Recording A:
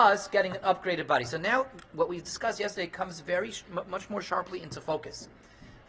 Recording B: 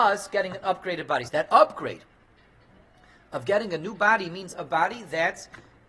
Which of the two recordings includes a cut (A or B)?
B